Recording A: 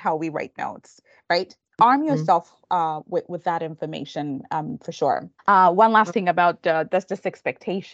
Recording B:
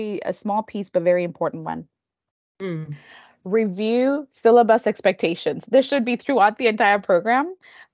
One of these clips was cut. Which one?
A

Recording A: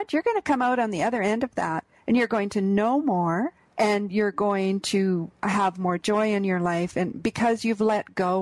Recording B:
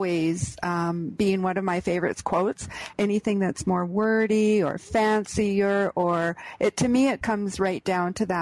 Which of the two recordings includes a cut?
B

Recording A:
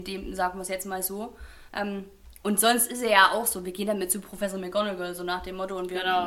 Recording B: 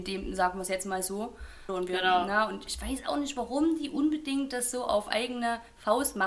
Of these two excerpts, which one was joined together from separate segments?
B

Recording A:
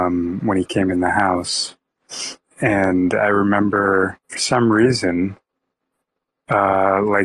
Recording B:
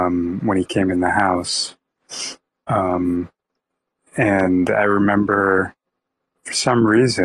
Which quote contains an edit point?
A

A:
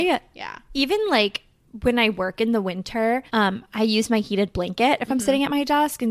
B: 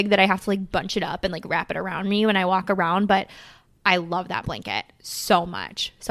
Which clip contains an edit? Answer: A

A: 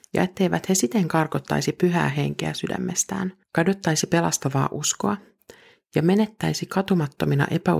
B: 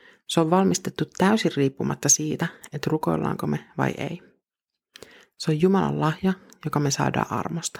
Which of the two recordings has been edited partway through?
A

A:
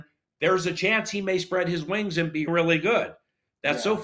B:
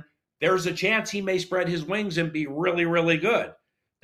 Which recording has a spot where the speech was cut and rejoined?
A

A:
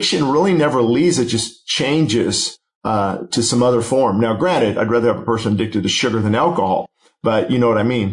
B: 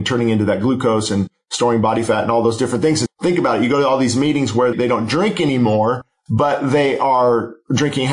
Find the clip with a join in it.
B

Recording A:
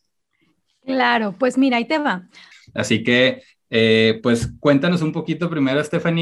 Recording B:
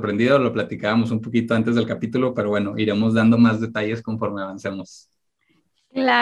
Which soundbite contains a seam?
A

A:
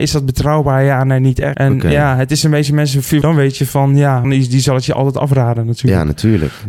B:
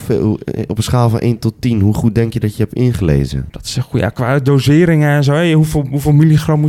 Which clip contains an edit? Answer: A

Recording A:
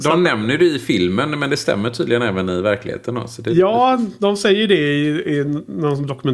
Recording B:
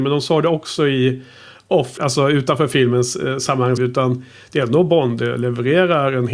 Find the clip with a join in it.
B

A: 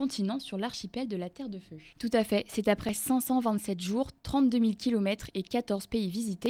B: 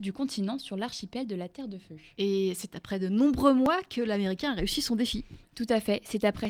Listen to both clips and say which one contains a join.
A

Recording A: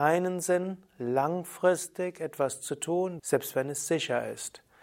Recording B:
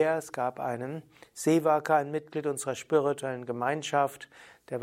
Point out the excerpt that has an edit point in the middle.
A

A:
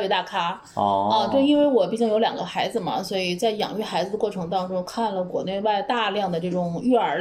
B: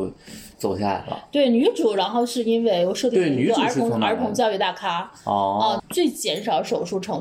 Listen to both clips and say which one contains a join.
B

